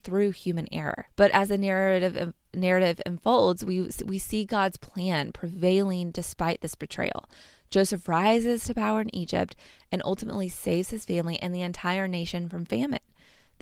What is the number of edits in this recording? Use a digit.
1